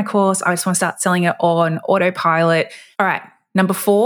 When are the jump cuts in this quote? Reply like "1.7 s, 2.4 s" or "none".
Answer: 2.9 s